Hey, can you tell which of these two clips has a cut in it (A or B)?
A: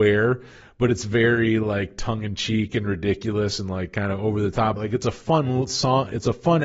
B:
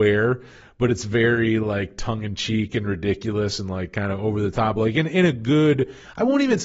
A